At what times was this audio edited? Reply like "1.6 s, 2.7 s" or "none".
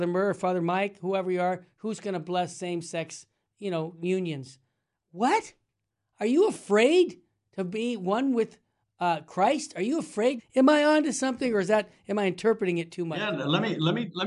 10.4 s